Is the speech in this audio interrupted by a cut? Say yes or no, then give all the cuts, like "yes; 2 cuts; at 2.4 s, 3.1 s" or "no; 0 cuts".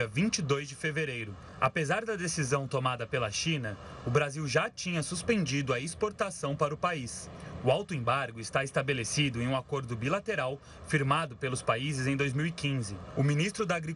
no; 0 cuts